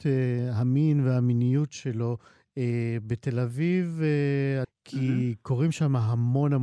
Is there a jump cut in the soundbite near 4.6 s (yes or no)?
yes